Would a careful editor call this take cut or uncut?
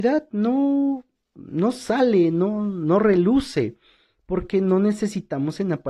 uncut